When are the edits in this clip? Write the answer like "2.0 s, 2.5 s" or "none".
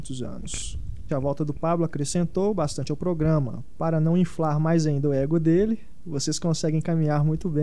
1.1 s